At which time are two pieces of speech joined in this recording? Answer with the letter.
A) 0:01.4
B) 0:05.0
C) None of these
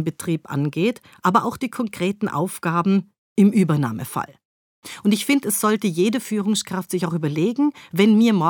C